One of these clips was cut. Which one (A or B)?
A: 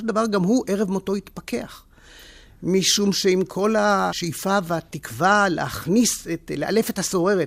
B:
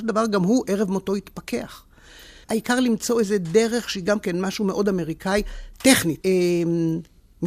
B